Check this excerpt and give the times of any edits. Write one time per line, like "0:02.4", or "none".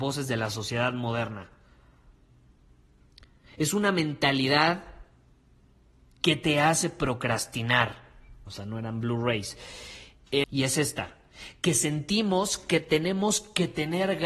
0:08.5
0:10.4